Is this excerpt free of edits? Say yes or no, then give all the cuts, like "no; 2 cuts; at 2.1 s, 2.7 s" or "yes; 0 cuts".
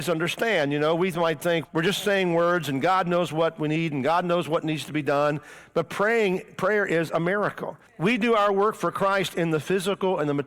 no; 2 cuts; at 1.6 s, 7.9 s